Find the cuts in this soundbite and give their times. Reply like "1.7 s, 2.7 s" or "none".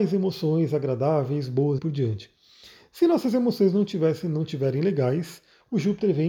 1.8 s